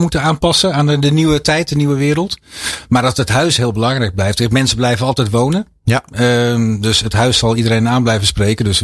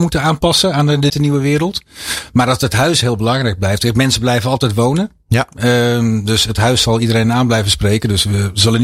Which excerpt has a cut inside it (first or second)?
second